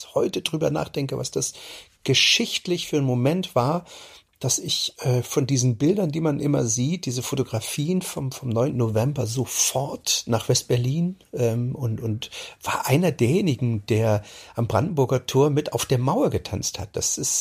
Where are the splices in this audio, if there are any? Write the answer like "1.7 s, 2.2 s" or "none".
8.7 s